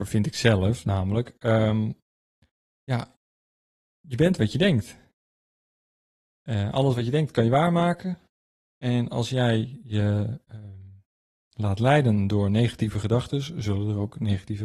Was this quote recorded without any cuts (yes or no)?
yes